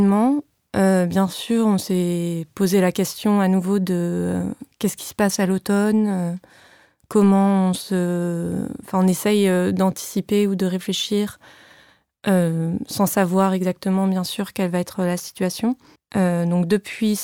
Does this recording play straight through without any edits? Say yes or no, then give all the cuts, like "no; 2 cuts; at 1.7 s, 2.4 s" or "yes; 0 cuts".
no; 1 cut; at 16.0 s